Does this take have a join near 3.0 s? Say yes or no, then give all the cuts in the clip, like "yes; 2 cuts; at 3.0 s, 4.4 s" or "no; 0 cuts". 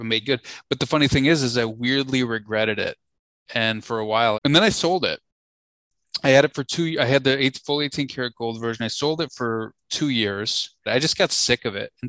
no; 2 cuts; at 4.3 s, 10.9 s